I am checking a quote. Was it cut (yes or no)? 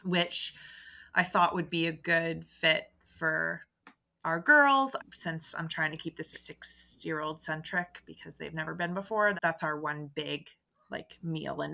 yes